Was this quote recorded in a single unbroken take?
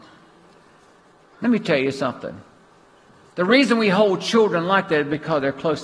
yes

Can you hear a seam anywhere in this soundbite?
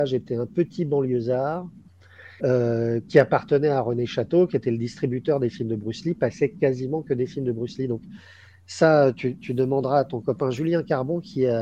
yes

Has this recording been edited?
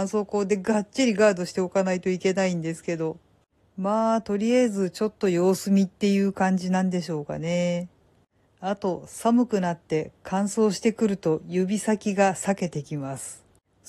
no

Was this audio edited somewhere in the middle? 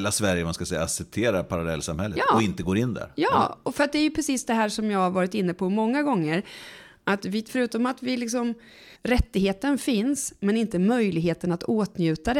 yes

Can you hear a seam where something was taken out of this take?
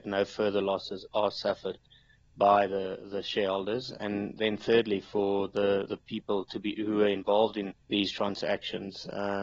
yes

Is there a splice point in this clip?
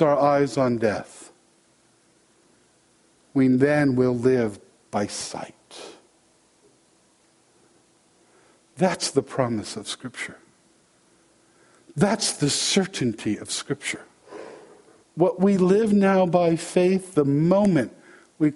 yes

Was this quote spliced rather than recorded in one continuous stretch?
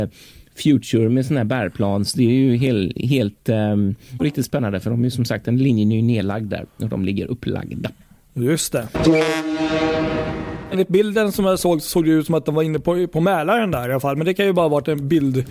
yes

